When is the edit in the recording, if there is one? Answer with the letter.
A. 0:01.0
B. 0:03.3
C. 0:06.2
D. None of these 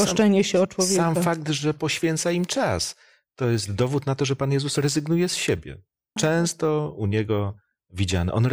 C